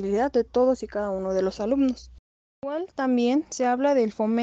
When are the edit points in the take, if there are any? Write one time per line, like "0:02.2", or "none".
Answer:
none